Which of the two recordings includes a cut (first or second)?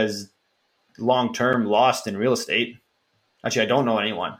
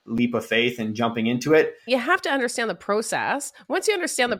second